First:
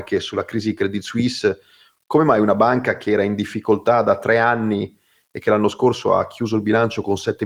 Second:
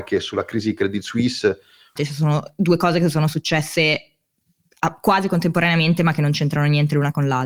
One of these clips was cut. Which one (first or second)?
second